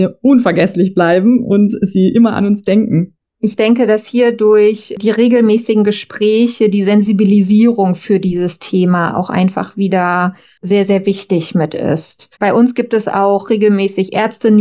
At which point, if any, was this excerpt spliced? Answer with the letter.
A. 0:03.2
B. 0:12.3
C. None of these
B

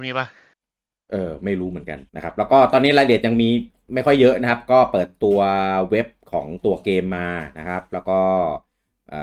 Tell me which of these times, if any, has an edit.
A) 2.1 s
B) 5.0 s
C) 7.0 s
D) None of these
A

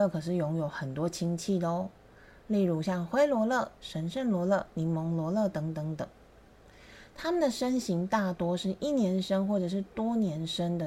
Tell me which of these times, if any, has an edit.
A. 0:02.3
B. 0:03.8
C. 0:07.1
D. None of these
B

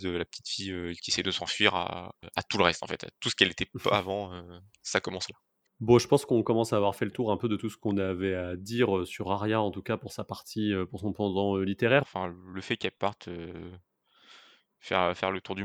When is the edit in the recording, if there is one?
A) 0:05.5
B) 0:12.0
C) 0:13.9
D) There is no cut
B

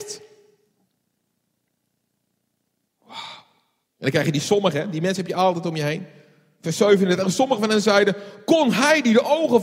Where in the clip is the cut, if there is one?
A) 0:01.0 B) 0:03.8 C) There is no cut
B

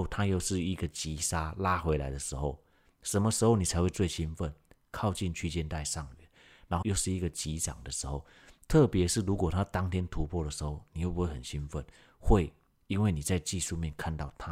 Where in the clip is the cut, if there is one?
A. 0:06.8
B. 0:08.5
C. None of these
A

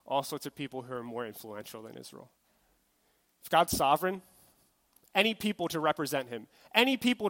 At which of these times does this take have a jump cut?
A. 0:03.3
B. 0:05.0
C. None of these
B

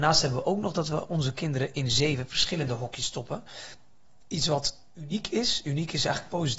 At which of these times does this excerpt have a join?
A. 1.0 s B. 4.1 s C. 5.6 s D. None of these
D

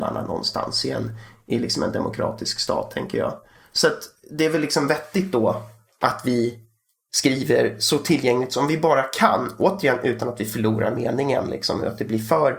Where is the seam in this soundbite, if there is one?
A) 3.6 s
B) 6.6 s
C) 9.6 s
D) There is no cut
D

